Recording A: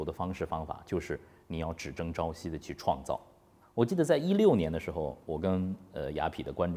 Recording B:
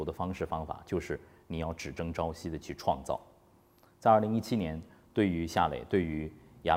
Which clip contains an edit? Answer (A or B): A